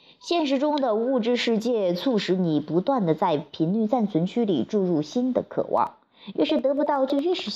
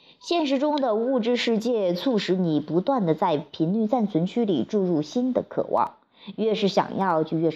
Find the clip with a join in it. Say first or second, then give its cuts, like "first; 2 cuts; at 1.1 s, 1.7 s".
first; 1 cut; at 6.3 s